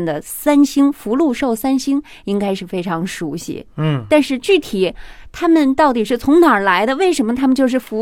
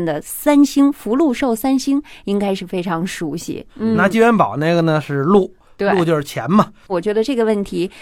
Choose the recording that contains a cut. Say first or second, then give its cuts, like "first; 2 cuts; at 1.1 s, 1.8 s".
second; 2 cuts; at 3.7 s, 6.9 s